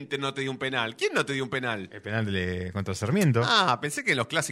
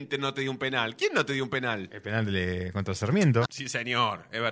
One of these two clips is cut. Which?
second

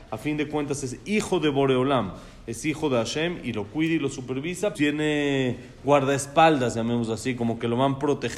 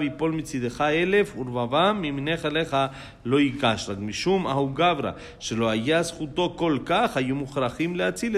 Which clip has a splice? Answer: first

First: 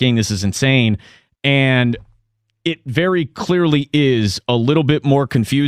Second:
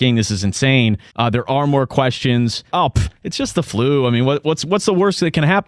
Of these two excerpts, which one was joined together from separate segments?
second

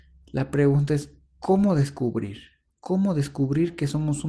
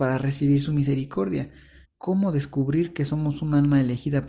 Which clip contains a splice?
second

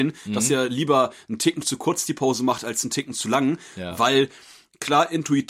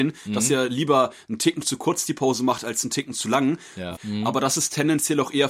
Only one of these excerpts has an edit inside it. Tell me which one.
second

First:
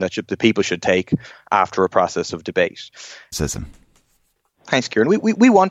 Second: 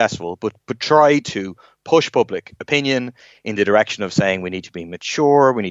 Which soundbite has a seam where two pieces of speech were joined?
first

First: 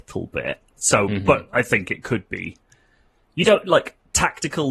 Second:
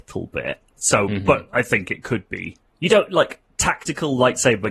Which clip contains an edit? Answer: second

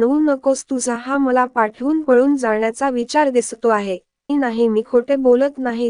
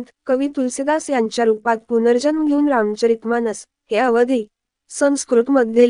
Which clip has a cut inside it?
first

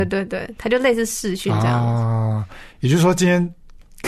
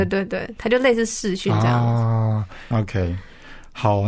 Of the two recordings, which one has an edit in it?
second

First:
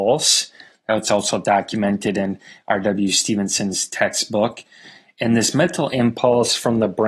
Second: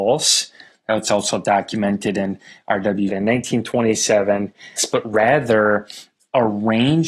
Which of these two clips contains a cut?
second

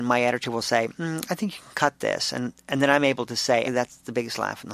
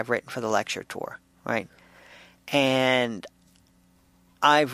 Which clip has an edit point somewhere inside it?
first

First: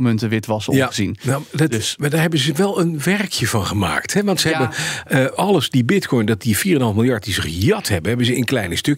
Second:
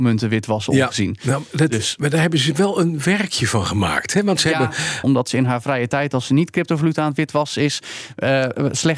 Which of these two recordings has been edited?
second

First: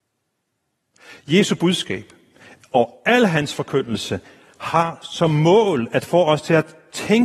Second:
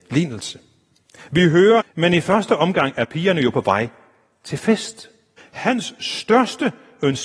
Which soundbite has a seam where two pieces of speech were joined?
second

